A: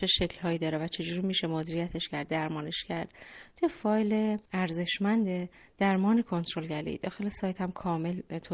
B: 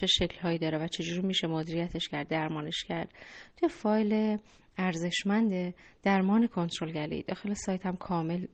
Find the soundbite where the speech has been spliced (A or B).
A